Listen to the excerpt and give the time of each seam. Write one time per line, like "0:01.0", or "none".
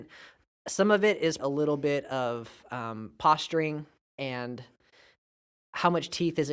0:01.4